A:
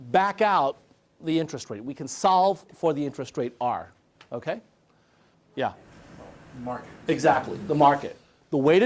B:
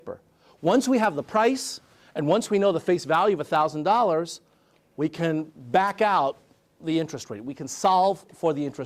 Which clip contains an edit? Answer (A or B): A